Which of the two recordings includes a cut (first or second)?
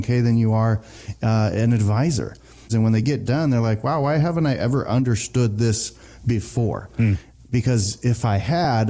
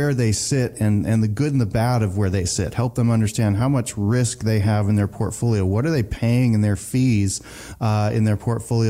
first